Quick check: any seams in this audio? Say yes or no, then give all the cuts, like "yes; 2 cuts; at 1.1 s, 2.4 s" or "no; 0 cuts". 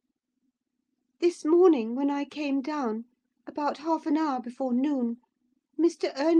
no; 0 cuts